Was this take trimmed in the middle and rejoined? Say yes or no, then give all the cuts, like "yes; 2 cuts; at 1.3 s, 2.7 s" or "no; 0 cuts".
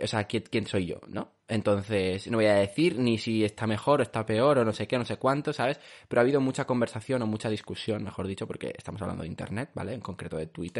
no; 0 cuts